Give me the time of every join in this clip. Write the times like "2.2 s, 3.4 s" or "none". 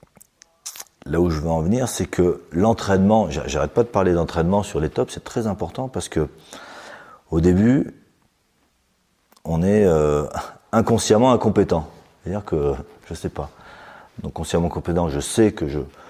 14.1 s